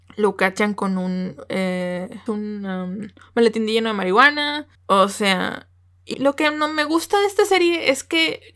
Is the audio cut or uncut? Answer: cut